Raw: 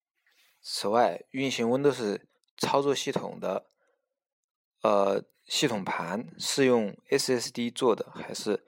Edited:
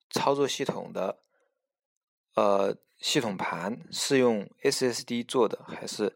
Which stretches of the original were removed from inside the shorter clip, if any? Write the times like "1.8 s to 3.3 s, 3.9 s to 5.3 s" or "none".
none